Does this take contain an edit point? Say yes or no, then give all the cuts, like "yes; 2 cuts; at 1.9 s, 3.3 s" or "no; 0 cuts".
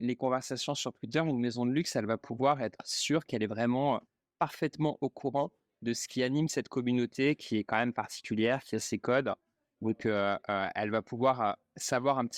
no; 0 cuts